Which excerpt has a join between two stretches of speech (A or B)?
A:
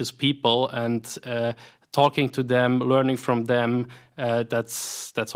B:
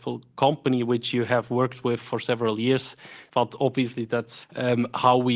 B